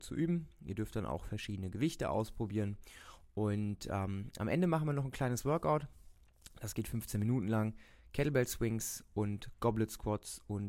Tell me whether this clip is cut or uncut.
uncut